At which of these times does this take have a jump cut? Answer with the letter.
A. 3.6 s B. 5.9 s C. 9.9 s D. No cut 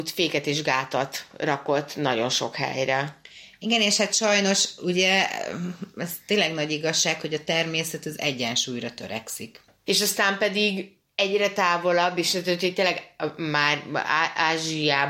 C